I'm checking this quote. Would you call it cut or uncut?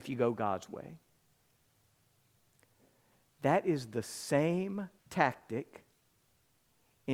cut